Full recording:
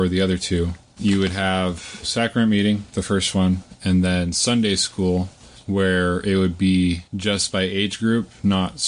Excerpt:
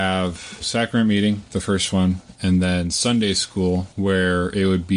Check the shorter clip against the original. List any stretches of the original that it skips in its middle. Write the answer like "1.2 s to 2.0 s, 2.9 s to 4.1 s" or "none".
5.3 s to 5.6 s